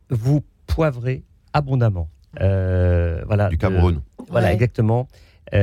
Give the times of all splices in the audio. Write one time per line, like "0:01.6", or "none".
0:02.3